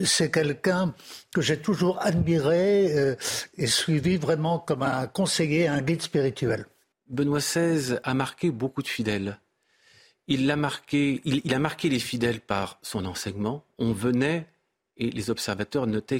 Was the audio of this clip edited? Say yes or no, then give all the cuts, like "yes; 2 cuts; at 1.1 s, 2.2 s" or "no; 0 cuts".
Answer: yes; 1 cut; at 6.9 s